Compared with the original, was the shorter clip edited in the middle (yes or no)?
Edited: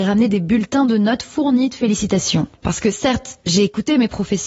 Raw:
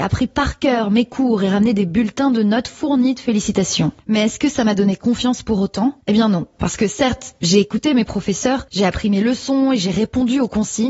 yes